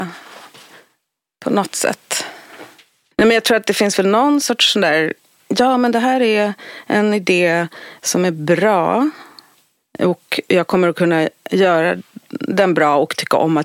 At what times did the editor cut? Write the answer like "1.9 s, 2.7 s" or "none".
none